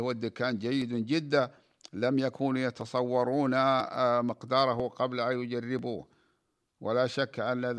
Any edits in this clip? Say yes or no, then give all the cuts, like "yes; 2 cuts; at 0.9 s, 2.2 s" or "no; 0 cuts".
no; 0 cuts